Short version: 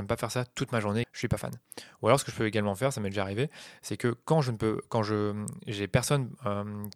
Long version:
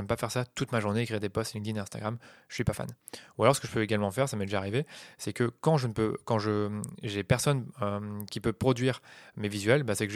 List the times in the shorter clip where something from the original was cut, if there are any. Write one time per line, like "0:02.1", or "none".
0:01.0